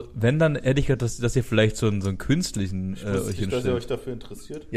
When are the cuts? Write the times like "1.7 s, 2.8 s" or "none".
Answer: none